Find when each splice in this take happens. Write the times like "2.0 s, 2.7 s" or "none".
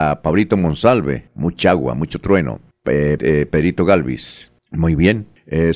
1.3 s, 3.2 s